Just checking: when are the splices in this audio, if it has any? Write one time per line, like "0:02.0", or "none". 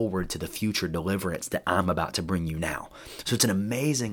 none